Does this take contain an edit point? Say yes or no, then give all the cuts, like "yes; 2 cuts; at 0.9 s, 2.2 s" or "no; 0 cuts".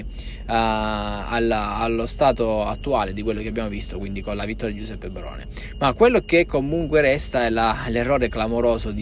no; 0 cuts